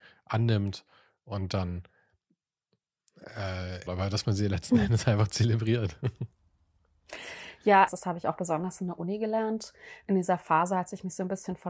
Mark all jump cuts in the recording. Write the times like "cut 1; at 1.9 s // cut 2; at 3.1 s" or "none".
cut 1; at 3.9 s // cut 2; at 7.9 s

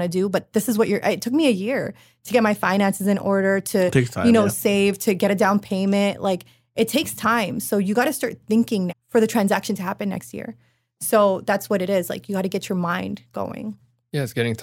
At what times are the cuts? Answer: cut 1; at 8.9 s

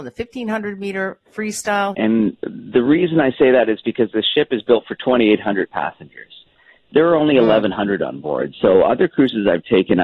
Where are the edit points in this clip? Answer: cut 1; at 1.9 s

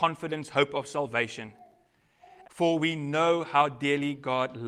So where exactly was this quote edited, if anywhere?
cut 1; at 2.4 s

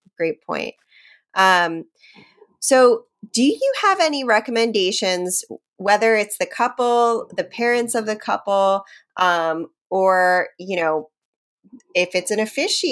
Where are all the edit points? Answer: none

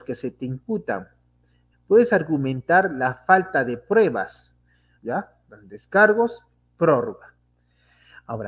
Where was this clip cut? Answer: cut 1; at 1.7 s // cut 2; at 5.0 s

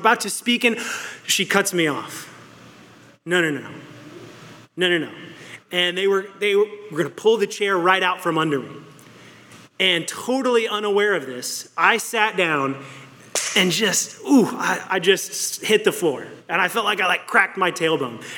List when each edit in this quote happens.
cut 1; at 5.6 s

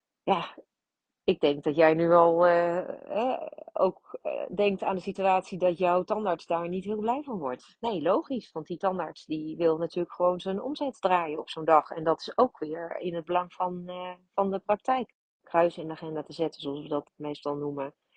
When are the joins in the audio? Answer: cut 1; at 15.4 s // cut 2; at 17.1 s

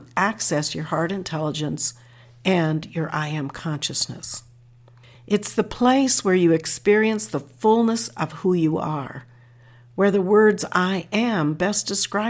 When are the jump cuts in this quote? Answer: cut 1; at 5.1 s

